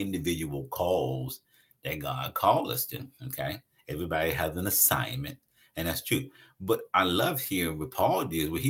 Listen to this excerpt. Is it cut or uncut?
uncut